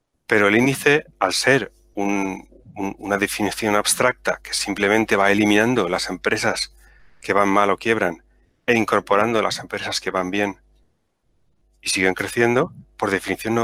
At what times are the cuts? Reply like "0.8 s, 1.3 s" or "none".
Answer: 1.1 s